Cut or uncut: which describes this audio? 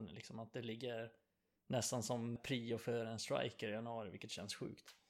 cut